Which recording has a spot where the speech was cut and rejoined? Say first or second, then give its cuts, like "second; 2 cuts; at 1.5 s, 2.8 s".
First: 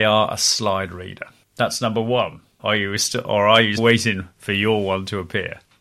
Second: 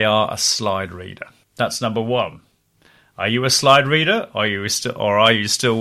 first; 2 cuts; at 2.6 s, 3.8 s